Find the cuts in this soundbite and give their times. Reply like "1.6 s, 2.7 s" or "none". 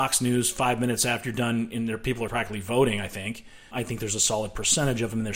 2.3 s, 3.7 s